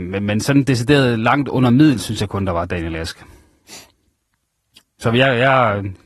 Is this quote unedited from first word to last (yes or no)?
no